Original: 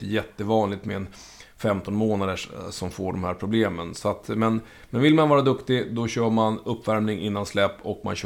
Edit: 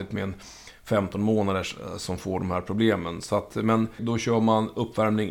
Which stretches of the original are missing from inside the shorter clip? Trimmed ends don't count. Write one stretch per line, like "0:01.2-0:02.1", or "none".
0:04.7-0:05.9